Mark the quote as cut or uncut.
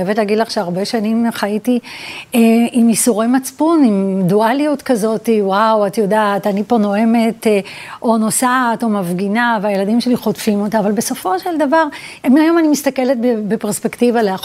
uncut